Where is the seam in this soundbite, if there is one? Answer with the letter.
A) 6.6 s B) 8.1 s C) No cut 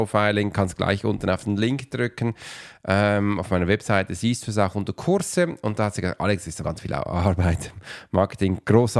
A